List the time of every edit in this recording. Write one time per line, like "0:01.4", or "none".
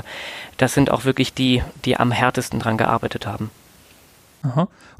none